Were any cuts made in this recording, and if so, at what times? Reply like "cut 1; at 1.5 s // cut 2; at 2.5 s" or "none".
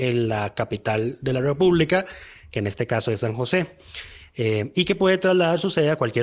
none